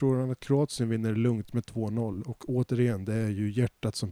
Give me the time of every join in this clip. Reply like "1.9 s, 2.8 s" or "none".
none